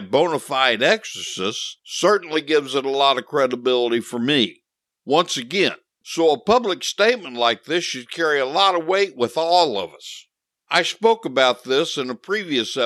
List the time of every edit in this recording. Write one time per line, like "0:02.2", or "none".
0:06.0
0:10.6